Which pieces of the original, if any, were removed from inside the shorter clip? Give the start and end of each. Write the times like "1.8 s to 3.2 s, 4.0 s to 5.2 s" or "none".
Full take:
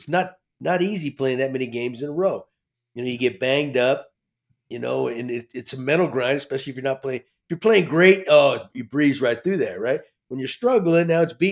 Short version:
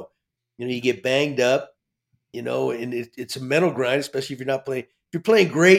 none